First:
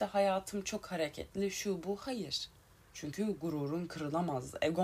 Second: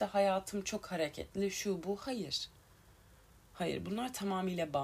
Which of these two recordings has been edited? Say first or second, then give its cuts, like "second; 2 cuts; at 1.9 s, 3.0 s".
first; 1 cut; at 2.8 s